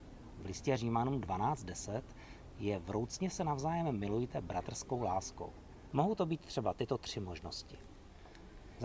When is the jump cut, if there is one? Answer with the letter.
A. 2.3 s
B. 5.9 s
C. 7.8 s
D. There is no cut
B